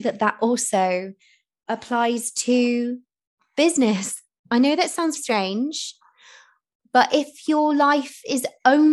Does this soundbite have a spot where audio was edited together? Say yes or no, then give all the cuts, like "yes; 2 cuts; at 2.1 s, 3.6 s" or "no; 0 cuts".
yes; 1 cut; at 5.2 s